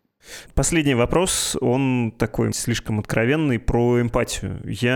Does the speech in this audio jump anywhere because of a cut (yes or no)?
yes